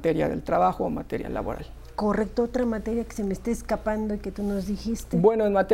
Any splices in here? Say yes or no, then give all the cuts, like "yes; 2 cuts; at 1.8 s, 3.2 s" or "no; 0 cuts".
no; 0 cuts